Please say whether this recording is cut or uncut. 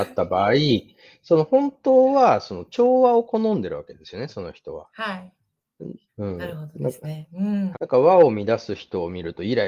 cut